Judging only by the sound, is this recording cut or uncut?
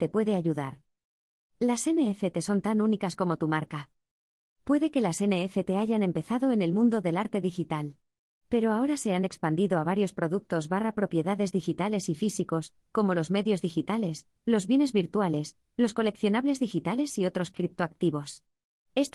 uncut